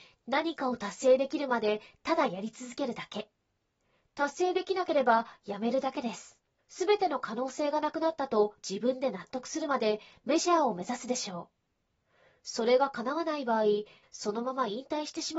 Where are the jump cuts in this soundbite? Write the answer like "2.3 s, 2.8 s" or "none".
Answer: 6.6 s, 14.0 s